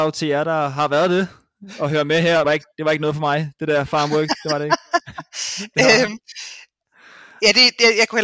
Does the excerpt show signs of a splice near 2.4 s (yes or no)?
yes